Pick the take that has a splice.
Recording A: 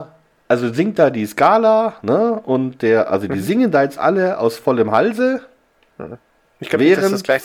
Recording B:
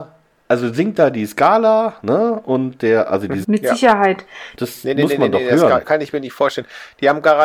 B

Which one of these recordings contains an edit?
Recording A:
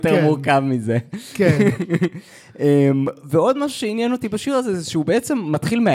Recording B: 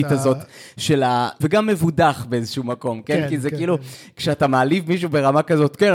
B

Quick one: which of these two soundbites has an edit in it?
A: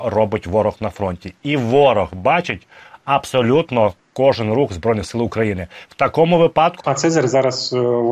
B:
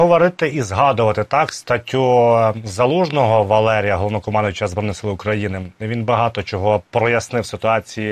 A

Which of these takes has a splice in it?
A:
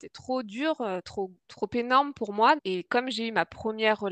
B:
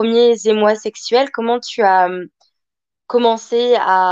A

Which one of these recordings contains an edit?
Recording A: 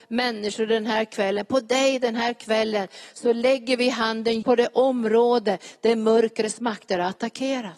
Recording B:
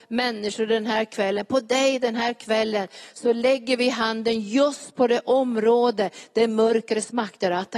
A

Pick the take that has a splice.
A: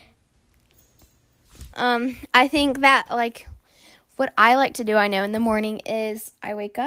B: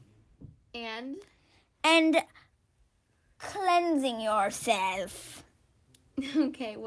A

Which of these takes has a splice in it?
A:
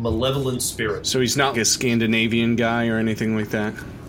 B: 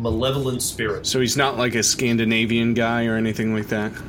A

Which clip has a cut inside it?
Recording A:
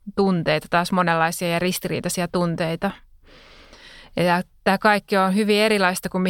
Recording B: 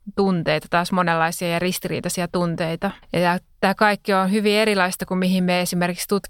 B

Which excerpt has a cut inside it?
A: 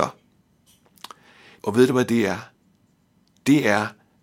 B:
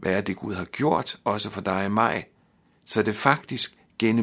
A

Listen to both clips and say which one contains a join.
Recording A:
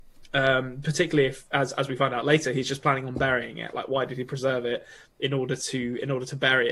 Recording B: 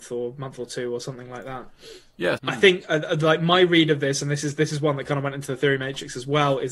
B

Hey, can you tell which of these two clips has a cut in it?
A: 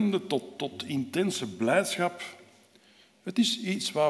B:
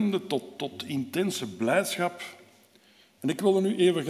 B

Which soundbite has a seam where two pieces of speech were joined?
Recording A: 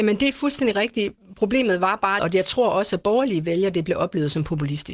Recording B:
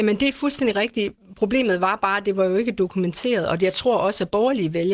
A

